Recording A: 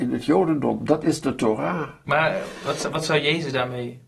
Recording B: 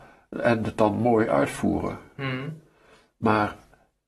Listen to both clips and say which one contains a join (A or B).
A